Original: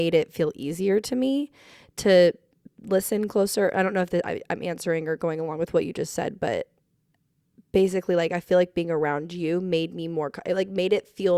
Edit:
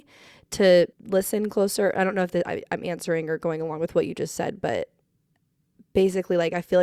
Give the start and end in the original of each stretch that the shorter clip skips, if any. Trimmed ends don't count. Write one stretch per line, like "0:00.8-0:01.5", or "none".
0:02.4-0:02.7